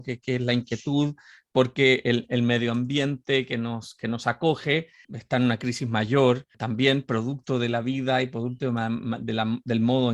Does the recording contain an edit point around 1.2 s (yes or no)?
no